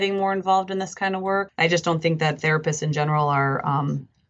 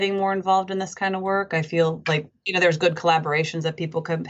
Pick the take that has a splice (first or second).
first